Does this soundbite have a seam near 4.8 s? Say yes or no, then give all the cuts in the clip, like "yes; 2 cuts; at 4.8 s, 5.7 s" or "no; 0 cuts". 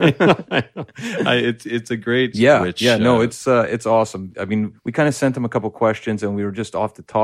no; 1 cut; at 2.3 s